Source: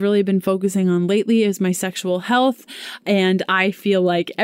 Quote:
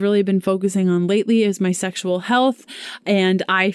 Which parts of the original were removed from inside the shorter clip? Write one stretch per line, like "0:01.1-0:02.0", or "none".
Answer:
none